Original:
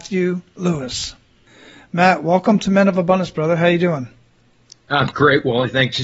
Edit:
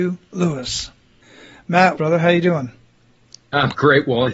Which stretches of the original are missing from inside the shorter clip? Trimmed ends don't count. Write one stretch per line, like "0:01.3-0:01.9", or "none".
0:02.2-0:03.3